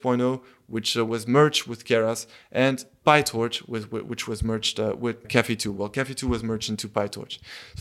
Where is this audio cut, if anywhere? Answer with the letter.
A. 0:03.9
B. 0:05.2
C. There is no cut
B